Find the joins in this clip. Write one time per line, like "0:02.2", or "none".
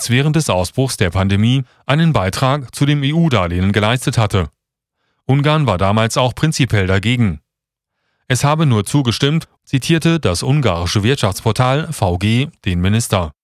0:09.6